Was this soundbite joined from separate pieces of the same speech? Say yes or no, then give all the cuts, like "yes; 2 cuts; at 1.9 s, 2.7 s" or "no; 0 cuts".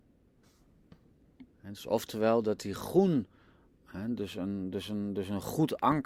yes; 1 cut; at 1.5 s